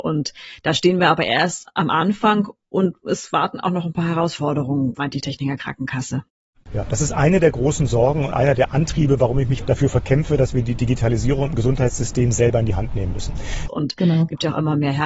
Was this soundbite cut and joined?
yes; 2 cuts; at 9.6 s, 13.7 s

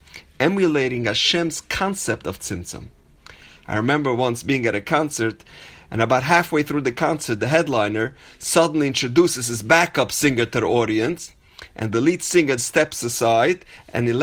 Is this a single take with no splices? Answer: no; 2 cuts; at 7.4 s, 12.6 s

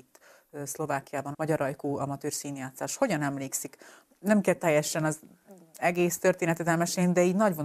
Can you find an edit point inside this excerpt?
yes; 1 cut; at 1.3 s

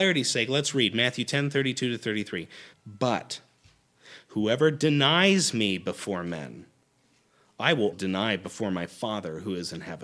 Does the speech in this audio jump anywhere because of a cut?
yes; 2 cuts; at 2.7 s, 7.9 s

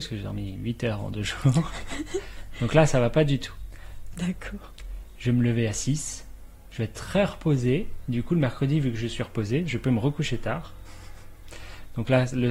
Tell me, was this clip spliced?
yes; 1 cut; at 4.1 s

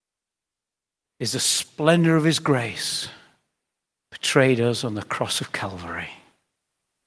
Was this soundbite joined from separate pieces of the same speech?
no; 0 cuts

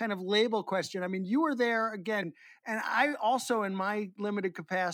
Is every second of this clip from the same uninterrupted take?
no; 1 cut; at 2.2 s

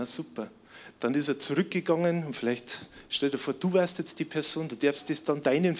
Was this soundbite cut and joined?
no; 0 cuts

